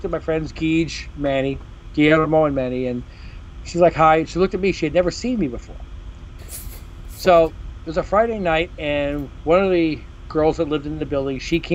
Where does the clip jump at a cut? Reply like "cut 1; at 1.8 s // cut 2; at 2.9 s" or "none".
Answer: cut 1; at 6.4 s